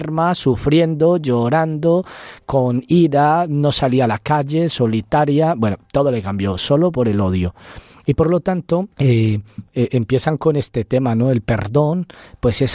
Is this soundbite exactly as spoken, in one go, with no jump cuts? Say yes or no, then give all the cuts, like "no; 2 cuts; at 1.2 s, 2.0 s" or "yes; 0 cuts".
no; 1 cut; at 8.9 s